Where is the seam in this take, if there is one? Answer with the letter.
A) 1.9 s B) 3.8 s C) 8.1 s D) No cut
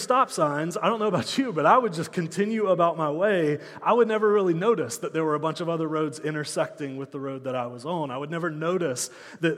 D